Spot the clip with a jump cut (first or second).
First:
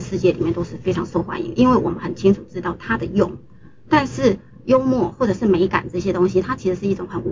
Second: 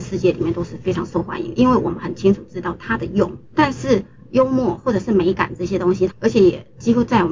second